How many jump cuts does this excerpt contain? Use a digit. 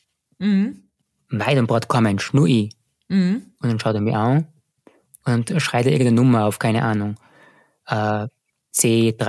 0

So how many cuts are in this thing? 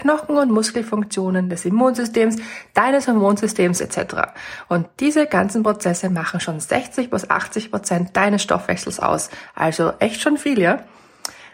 0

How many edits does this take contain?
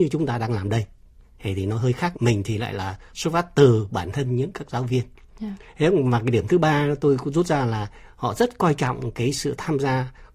1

